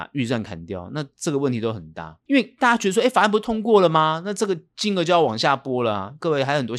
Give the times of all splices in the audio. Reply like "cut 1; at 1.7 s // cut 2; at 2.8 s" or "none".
cut 1; at 2.2 s